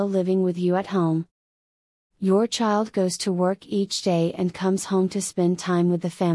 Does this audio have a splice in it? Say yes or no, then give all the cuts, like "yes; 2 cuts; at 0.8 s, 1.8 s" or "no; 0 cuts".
no; 0 cuts